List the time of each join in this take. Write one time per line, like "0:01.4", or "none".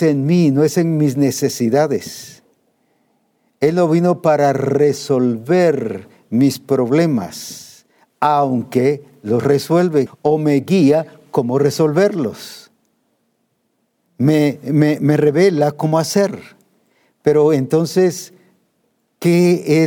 0:10.1